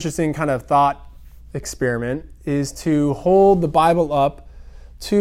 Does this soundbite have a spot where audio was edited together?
no; 0 cuts

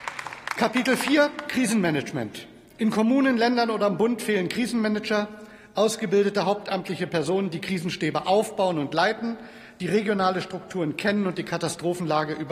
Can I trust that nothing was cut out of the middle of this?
yes; 0 cuts

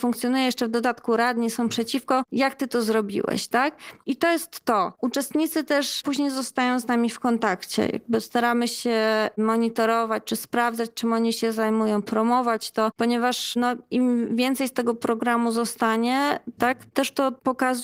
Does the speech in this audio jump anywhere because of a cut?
yes; 1 cut; at 16.6 s

